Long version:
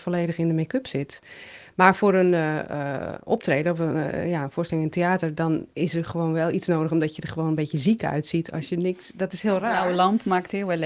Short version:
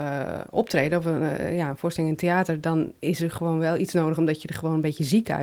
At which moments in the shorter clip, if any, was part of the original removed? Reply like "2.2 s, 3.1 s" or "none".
none